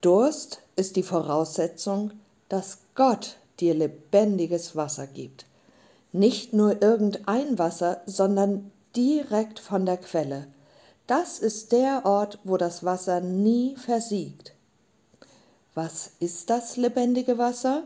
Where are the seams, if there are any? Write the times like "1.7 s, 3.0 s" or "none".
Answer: none